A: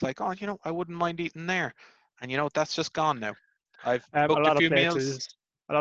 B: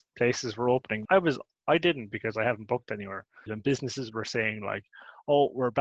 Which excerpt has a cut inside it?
B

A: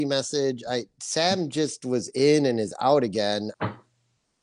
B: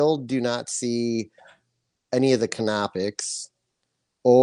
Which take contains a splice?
A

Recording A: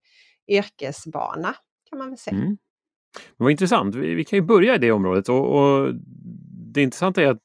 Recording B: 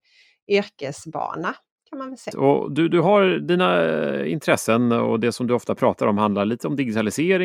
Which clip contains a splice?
B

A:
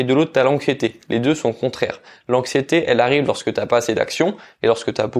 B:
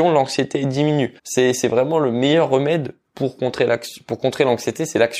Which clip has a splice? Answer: B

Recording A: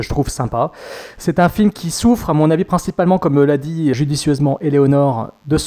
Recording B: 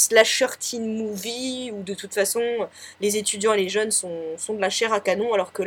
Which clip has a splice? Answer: A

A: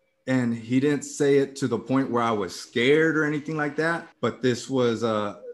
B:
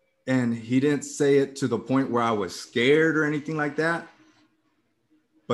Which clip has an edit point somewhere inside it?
A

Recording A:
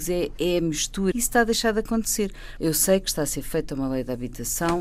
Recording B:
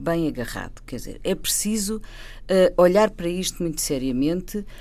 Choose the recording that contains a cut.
A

